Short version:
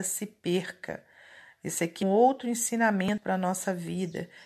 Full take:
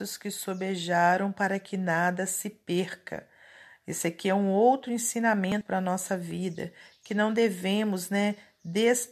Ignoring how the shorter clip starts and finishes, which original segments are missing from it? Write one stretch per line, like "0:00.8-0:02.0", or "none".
0:04.3-0:04.5